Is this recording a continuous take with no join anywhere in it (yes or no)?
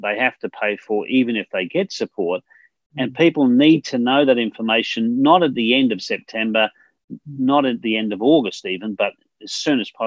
yes